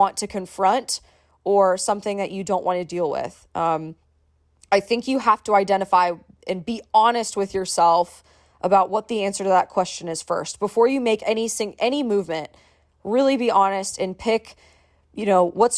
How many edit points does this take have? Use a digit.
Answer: 0